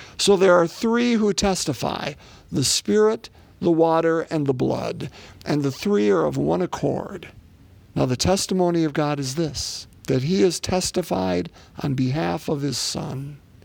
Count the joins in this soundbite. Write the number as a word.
two